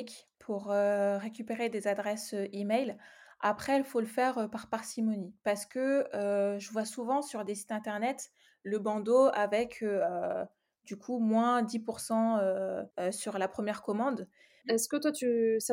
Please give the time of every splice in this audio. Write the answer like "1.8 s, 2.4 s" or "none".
12.9 s, 14.6 s